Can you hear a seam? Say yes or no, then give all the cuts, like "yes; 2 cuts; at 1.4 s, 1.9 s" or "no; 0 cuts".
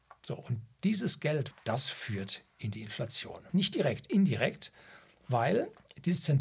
yes; 2 cuts; at 1.5 s, 3.5 s